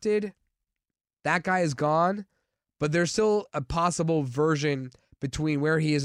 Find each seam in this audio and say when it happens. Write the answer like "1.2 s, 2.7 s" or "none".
none